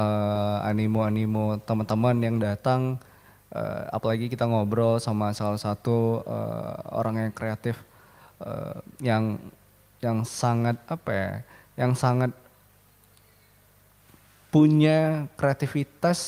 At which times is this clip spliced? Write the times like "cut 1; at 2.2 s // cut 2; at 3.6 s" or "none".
none